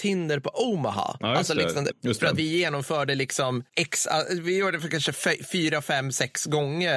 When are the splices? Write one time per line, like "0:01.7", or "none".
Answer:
0:01.9